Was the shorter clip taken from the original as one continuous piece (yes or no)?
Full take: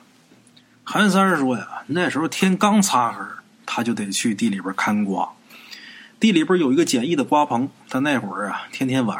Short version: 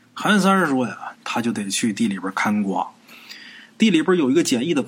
no